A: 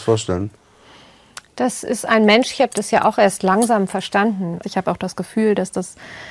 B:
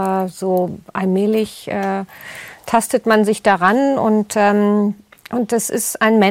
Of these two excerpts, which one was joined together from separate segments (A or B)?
A